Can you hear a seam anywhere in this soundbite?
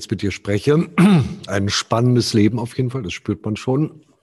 yes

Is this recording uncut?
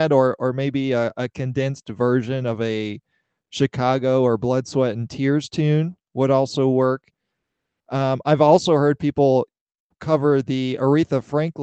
yes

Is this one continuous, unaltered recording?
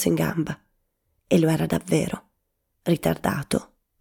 yes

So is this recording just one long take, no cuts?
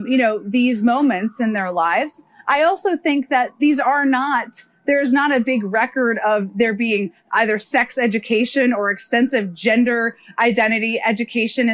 yes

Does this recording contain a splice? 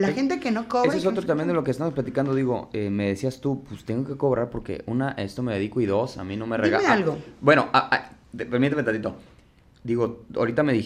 no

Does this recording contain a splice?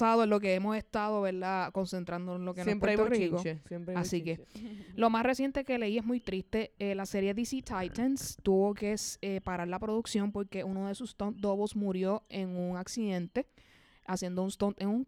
no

